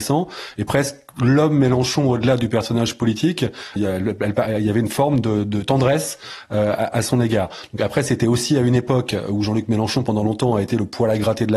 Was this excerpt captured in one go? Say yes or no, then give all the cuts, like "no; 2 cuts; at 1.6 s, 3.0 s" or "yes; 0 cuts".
no; 1 cut; at 3.8 s